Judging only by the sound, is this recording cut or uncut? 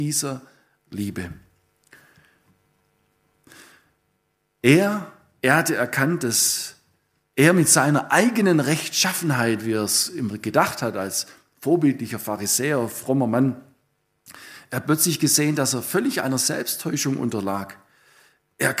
uncut